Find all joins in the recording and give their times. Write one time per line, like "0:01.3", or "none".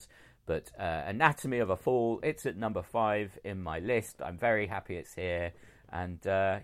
none